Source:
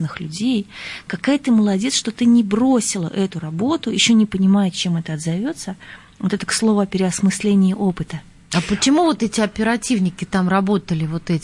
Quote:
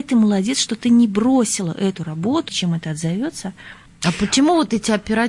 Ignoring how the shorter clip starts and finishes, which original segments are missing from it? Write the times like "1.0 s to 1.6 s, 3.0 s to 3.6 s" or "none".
3.8 s to 4.7 s, 6.1 s to 8.3 s